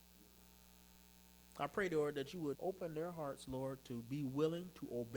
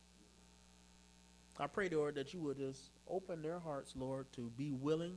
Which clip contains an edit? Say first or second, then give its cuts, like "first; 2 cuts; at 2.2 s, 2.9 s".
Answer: first; 1 cut; at 2.5 s